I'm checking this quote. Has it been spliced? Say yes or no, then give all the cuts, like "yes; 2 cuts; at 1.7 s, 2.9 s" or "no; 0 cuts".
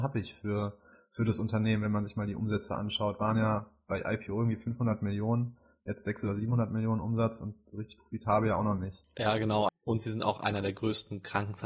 yes; 1 cut; at 9.7 s